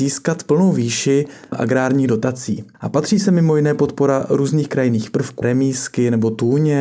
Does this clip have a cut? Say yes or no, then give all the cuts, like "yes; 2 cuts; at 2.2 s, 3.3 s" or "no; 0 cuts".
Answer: yes; 1 cut; at 5.4 s